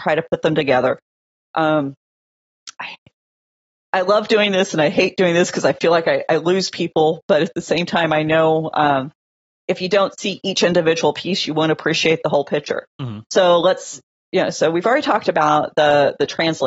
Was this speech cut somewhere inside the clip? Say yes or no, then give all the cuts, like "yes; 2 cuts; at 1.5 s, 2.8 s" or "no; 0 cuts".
no; 0 cuts